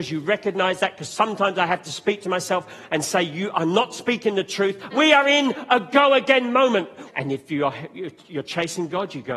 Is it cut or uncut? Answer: cut